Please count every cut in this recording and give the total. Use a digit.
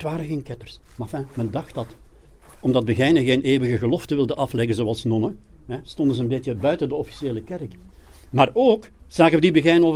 1